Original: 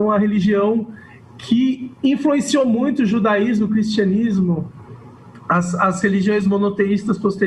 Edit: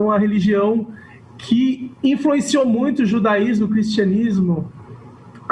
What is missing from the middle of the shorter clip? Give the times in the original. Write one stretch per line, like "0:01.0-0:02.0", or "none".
none